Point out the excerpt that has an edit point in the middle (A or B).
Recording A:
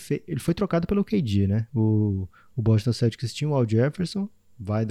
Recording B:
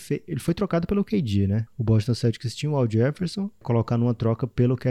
B